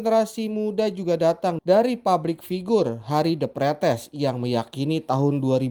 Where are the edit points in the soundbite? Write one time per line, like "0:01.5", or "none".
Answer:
none